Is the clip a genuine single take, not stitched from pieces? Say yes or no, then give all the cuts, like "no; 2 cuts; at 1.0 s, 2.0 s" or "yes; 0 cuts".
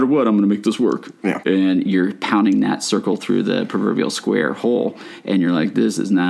no; 1 cut; at 1.4 s